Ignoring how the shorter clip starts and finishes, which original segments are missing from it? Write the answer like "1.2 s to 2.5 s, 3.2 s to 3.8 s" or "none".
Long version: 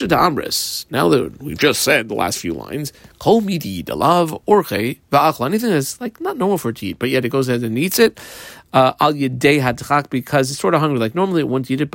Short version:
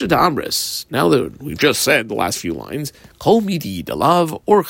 none